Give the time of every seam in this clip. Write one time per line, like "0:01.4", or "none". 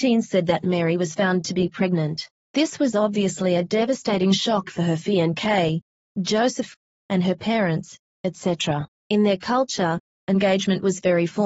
none